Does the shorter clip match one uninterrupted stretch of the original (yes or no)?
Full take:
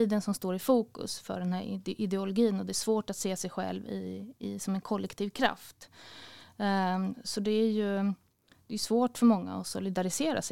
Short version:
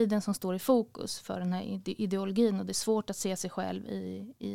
yes